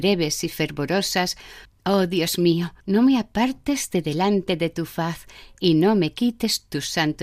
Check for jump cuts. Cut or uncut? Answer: cut